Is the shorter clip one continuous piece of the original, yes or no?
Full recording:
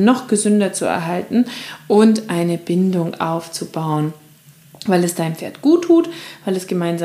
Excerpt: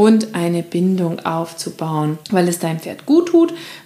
no